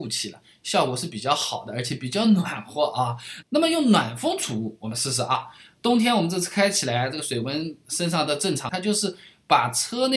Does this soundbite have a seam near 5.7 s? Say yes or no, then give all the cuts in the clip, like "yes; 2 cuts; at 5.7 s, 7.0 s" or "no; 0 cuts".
no; 2 cuts; at 3.4 s, 8.7 s